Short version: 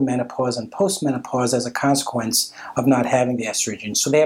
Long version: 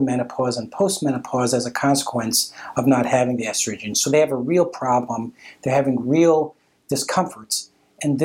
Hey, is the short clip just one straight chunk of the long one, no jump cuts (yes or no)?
yes